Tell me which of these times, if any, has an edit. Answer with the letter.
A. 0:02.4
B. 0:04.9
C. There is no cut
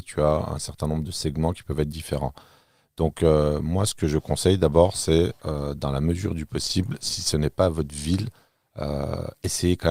C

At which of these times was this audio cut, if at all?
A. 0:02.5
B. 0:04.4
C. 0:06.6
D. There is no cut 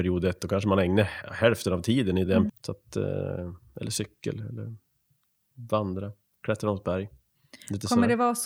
A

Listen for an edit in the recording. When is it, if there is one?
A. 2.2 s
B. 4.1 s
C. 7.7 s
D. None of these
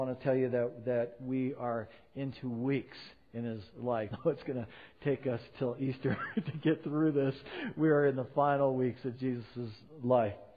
B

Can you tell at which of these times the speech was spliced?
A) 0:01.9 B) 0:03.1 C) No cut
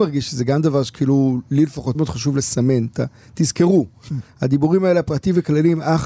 A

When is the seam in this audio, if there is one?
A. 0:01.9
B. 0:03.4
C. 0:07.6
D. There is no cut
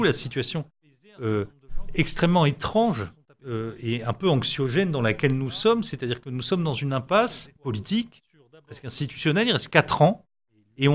C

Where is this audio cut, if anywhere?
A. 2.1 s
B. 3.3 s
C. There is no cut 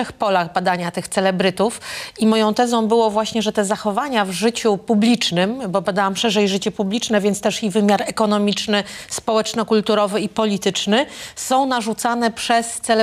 C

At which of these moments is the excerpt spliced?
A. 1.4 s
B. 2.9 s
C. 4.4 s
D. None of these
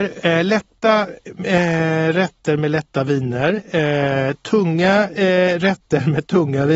D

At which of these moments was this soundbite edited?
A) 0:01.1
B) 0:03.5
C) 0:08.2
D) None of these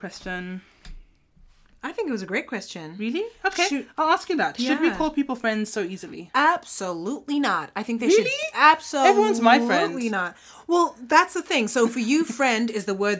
D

